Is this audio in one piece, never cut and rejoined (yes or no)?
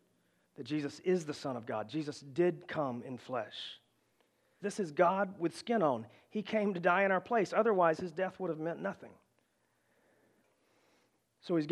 no